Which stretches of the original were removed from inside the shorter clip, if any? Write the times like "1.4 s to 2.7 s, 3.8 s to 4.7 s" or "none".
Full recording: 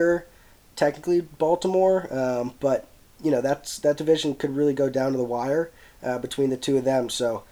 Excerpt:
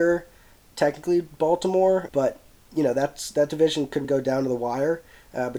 2.1 s to 2.6 s, 4.5 s to 4.7 s